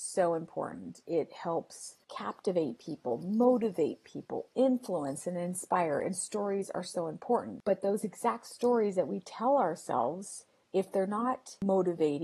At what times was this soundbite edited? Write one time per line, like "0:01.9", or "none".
none